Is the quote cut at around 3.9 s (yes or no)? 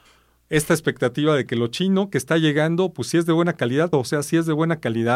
yes